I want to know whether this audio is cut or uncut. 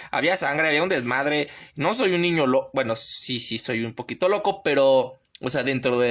uncut